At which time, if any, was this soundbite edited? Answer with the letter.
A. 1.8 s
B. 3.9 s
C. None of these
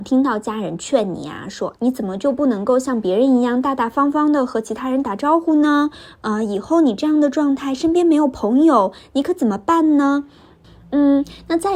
A